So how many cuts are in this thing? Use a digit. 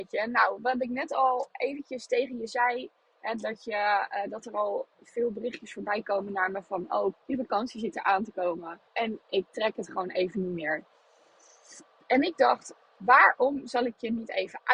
2